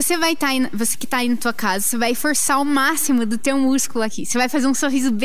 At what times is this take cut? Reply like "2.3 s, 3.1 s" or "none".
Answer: none

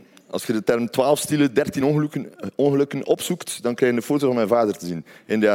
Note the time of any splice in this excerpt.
none

